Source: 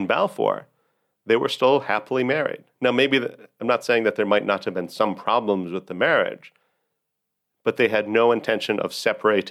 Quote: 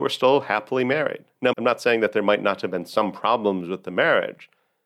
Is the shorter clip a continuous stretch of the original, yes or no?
no